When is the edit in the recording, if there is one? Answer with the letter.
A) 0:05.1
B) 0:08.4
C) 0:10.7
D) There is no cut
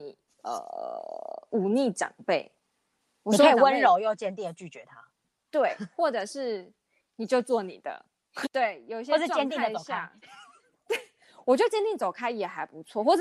B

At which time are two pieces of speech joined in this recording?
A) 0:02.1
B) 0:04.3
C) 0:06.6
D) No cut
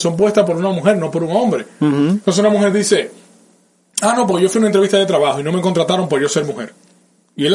D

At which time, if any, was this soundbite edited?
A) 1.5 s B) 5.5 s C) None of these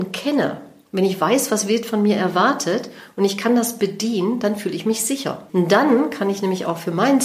B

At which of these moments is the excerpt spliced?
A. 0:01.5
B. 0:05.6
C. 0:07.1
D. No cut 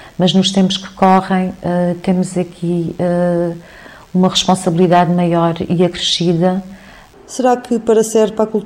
C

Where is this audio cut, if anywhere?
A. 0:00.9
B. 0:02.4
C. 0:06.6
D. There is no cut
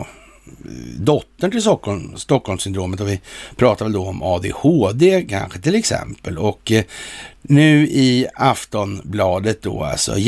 D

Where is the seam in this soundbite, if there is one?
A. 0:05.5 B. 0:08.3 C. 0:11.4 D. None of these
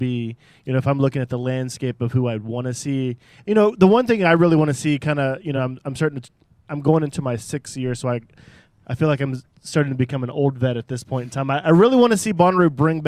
D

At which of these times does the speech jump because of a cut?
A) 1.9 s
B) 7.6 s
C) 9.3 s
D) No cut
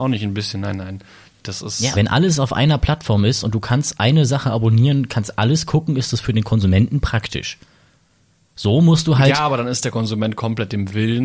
A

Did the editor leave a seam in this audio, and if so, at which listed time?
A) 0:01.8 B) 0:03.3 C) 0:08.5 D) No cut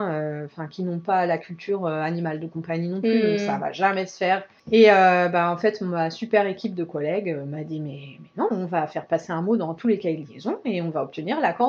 C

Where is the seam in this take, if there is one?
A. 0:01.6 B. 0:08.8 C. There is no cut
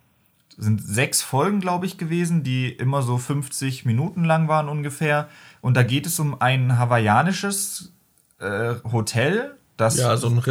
B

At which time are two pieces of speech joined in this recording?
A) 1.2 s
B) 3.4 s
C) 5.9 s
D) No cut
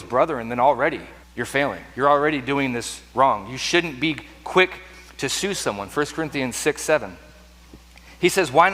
A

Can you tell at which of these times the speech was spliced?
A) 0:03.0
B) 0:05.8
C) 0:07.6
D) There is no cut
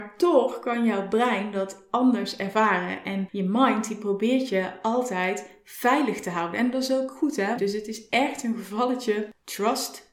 C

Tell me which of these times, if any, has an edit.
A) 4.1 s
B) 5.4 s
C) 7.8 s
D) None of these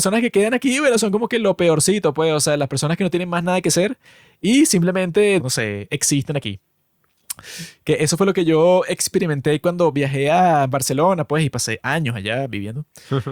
B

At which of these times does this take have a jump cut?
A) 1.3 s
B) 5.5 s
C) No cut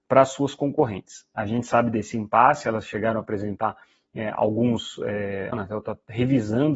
B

